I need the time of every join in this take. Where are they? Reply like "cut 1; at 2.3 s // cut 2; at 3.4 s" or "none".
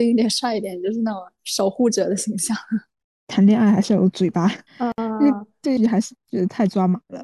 cut 1; at 4.7 s // cut 2; at 5.8 s